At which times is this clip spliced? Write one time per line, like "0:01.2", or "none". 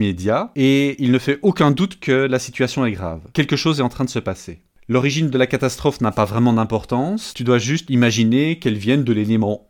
0:07.9